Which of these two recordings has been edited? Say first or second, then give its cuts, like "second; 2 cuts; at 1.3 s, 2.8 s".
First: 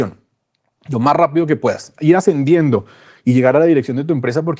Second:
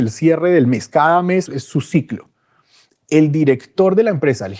second; 1 cut; at 1.5 s